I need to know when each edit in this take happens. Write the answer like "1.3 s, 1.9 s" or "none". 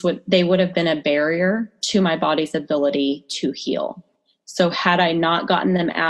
none